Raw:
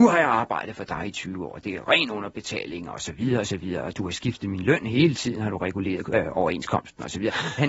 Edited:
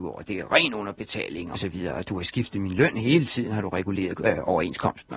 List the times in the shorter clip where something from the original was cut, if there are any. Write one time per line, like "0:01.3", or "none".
0:01.5